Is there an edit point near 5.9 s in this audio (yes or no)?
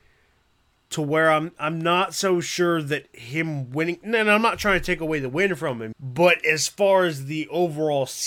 yes